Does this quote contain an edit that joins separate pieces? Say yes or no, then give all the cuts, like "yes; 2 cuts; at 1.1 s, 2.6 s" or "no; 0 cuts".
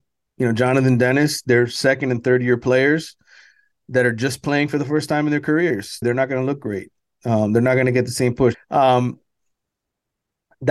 yes; 2 cuts; at 6.0 s, 8.5 s